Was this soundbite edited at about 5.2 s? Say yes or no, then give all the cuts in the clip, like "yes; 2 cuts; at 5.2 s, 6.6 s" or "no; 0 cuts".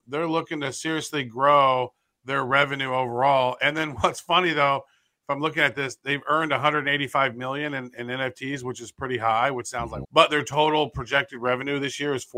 no; 1 cut; at 10.0 s